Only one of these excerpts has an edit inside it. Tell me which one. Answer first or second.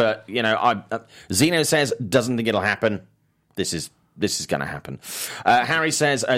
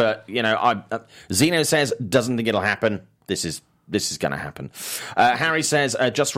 second